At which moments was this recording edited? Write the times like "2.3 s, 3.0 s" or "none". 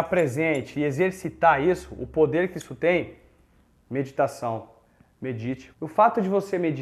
5.7 s